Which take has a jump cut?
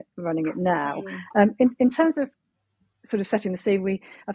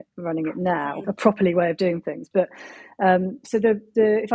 second; 2 cuts; at 1.0 s, 2.3 s

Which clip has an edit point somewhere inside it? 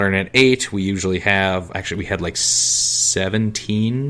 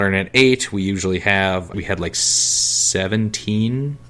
second; 1 cut; at 1.7 s

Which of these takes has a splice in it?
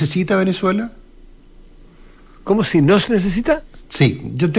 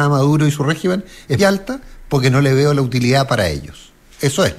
second; 1 cut; at 1.4 s

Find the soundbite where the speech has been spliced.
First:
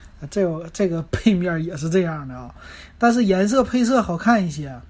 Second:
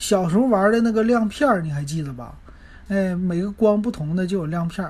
second; 1 cut; at 2.9 s

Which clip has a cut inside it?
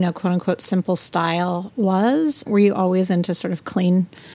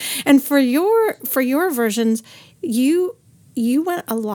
first; 1 cut; at 2.5 s

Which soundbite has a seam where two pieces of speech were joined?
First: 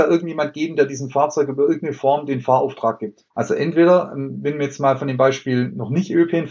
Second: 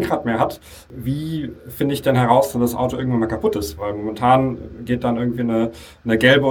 first; 1 cut; at 3.3 s

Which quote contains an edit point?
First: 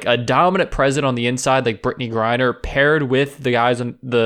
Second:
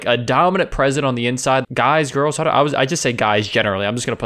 second; 1 cut; at 1.6 s

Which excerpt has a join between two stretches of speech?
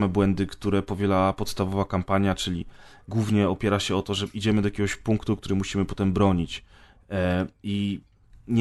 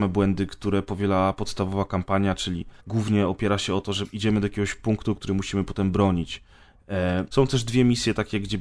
second; 2 cuts; at 2.8 s, 7.3 s

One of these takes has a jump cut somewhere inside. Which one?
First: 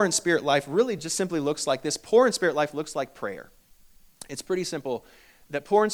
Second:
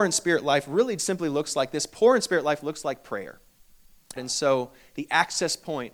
second; 2 cuts; at 1.0 s, 4.2 s

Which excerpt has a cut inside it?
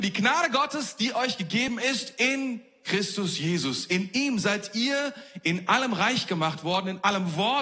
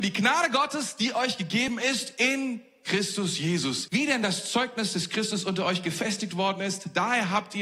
second; 1 cut; at 3.9 s

